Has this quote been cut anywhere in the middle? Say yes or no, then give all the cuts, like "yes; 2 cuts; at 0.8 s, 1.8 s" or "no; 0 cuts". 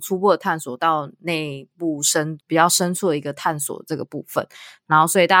no; 0 cuts